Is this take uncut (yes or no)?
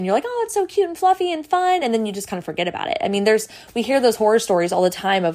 yes